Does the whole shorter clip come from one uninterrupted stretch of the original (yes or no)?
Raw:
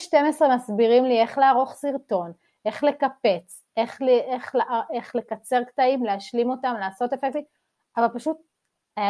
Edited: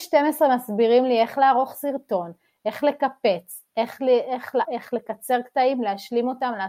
no